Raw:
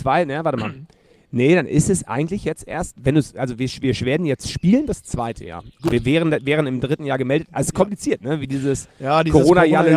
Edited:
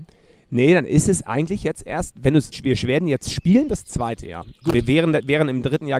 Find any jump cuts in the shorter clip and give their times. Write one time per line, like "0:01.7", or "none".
0:02.5